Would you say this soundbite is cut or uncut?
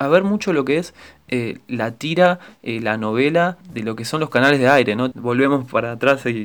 cut